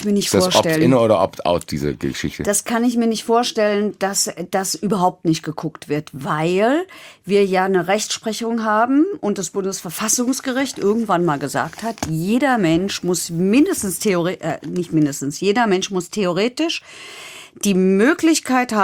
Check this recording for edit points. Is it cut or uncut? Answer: uncut